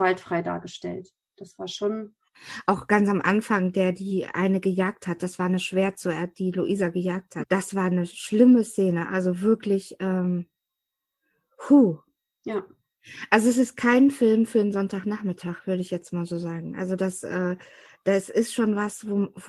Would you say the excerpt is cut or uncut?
cut